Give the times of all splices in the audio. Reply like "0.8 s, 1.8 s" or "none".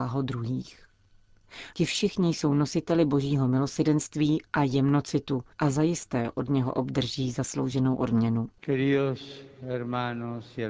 1.7 s, 5.5 s